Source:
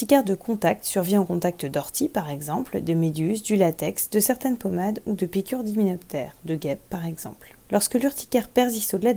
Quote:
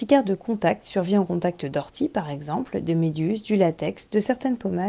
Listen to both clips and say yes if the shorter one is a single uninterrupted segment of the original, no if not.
yes